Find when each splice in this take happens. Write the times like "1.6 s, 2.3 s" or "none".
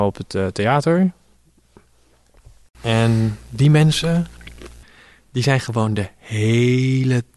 none

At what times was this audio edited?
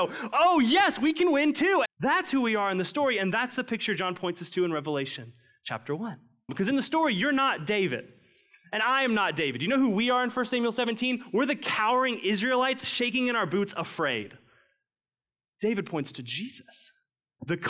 1.8 s, 6.5 s

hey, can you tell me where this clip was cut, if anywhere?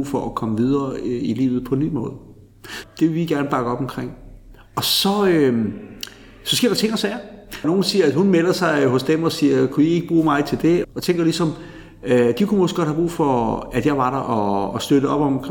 2.8 s, 7.6 s, 10.8 s

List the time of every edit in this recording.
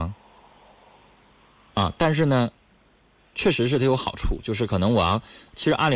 1.7 s

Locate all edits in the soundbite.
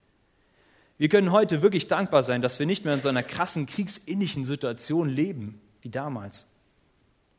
none

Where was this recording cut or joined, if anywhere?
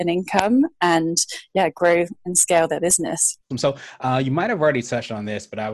3.5 s

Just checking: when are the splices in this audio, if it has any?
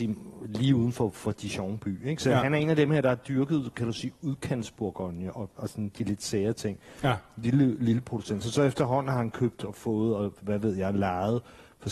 none

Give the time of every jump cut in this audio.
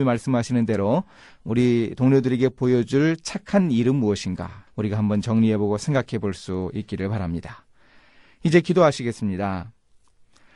4.7 s

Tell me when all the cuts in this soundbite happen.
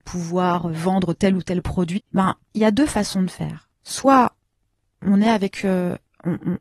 2.0 s

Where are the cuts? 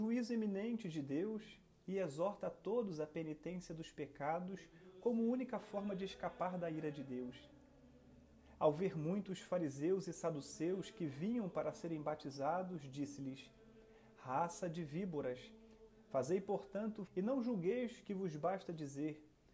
15.9 s, 17.1 s

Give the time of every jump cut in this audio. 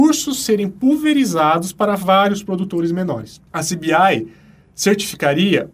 3.5 s

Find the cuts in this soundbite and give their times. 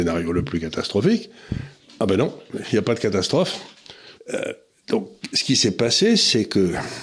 4.2 s

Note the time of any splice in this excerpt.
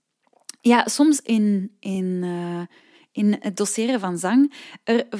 none

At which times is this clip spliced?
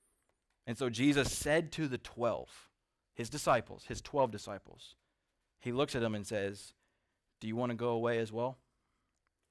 none

